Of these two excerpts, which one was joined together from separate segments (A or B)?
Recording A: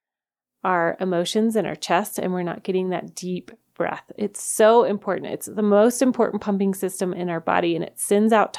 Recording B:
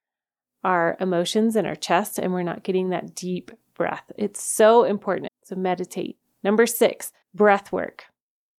B